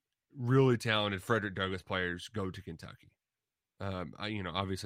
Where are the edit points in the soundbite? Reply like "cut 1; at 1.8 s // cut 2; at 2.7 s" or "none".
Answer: none